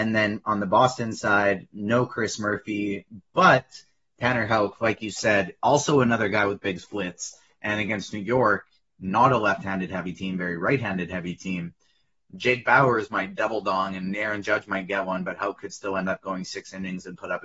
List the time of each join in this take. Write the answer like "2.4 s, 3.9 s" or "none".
none